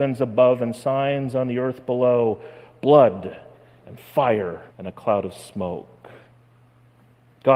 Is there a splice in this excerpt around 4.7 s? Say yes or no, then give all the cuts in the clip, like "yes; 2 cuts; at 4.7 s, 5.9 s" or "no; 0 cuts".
yes; 1 cut; at 4.7 s